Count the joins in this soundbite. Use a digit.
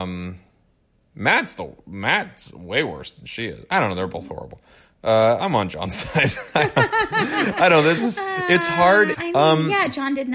1